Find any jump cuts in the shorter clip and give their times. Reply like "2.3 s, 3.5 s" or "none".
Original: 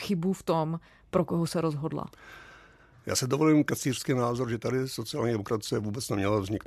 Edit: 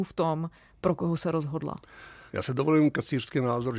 2.3 s